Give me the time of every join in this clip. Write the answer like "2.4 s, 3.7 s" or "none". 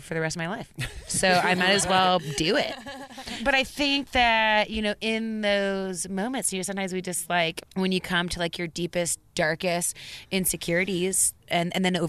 none